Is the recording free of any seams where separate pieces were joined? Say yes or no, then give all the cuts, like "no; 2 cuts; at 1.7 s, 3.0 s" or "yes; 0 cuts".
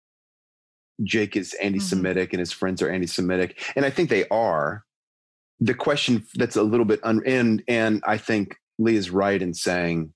yes; 0 cuts